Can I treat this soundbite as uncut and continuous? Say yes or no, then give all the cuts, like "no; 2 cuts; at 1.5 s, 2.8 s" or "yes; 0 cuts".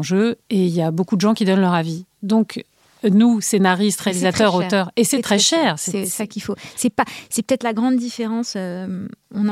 yes; 0 cuts